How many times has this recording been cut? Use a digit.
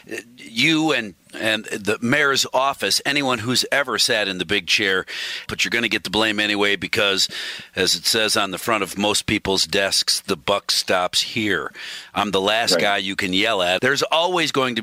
2